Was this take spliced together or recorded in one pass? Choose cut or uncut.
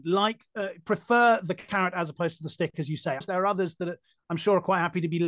cut